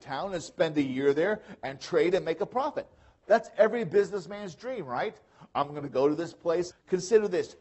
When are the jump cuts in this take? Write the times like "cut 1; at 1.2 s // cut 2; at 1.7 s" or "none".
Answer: cut 1; at 6.7 s